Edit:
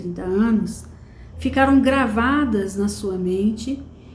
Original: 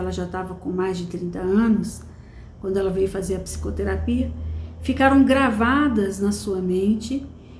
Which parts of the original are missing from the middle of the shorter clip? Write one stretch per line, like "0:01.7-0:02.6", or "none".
0:02.5-0:04.8